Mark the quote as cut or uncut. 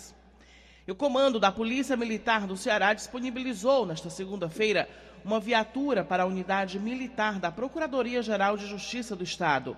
uncut